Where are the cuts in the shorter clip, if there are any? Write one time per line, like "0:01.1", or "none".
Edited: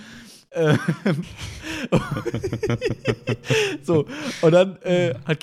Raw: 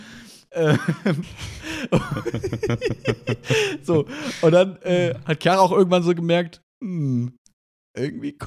none